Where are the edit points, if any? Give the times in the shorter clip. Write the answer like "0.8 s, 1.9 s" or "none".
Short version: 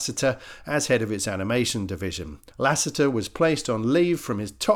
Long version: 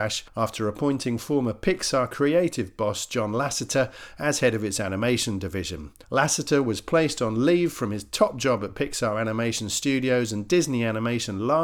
none